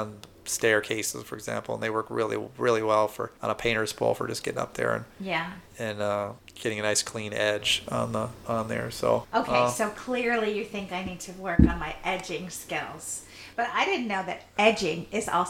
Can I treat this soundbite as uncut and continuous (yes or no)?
yes